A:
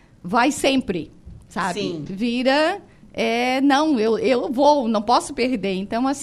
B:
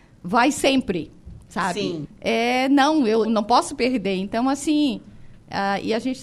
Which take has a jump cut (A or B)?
B